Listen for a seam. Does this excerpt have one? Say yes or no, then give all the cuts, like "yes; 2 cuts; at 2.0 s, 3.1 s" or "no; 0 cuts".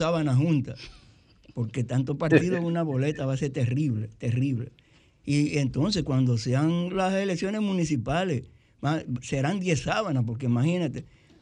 no; 0 cuts